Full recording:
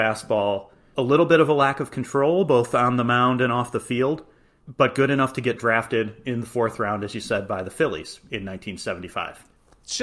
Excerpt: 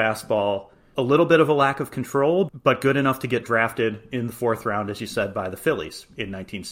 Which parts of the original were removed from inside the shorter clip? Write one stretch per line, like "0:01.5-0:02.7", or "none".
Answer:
0:02.5-0:04.6